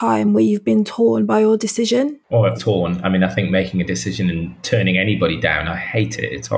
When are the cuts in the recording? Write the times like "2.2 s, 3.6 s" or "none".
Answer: 2.6 s